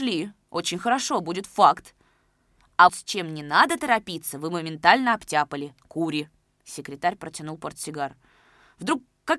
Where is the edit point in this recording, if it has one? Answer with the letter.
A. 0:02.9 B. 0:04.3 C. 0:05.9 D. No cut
A